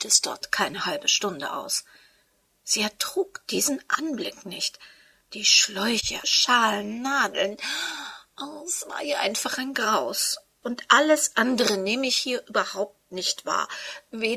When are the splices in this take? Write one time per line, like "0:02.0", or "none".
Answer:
0:06.2
0:10.6